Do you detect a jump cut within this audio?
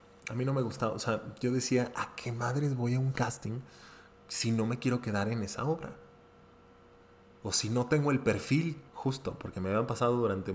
yes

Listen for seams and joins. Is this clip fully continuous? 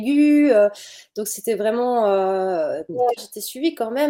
no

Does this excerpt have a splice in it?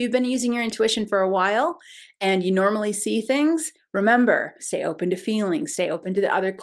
yes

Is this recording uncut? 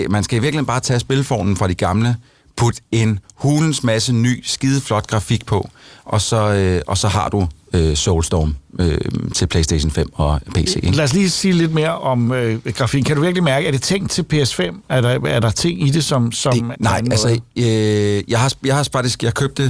no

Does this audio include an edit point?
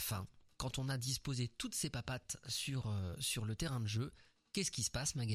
no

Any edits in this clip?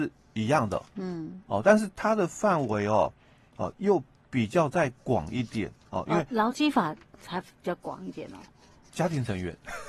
no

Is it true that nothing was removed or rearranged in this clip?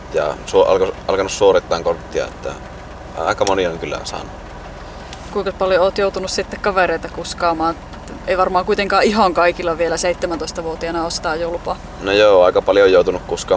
yes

